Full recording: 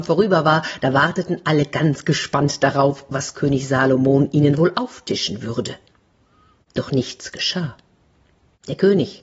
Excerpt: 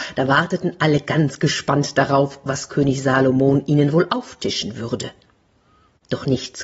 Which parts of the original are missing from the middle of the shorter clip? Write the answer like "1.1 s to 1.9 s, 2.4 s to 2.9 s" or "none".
none

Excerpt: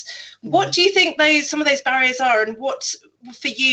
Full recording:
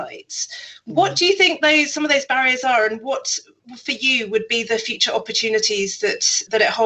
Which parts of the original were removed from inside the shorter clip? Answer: none

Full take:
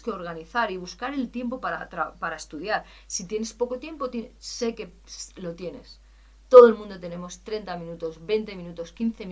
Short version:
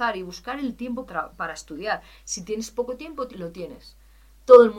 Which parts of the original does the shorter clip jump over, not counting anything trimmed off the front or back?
1.6 s to 1.9 s, 4.1 s to 5.3 s

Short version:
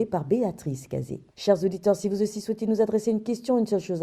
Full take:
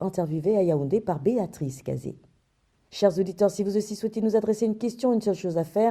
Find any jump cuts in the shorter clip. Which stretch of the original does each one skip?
2.2 s to 2.8 s

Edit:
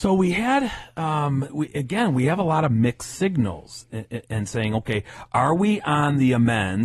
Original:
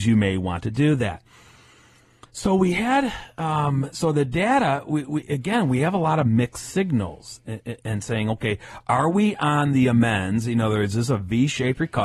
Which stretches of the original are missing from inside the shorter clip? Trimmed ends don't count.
3.9 s to 5.0 s

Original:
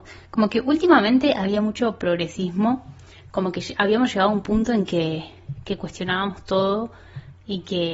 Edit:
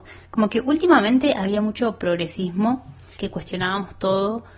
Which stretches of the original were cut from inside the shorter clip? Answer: 3.2 s to 5.6 s

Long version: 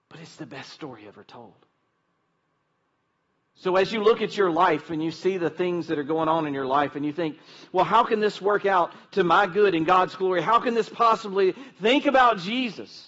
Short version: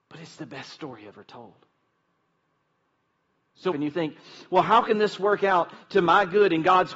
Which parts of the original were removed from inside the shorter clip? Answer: 3.7 s to 6.9 s

